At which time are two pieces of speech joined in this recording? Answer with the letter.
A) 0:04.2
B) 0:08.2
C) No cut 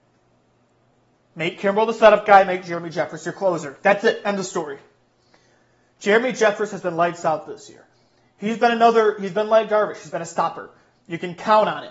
C